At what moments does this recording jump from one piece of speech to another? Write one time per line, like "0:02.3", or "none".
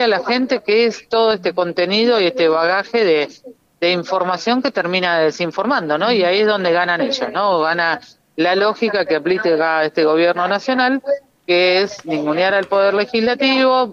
none